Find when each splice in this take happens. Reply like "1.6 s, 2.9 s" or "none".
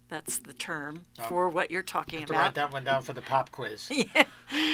none